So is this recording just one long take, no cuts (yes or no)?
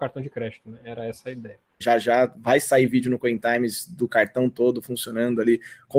no